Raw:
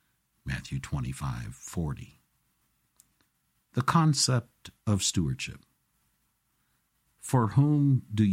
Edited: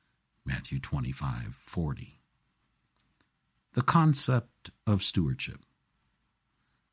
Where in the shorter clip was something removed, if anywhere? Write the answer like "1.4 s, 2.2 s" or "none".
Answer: none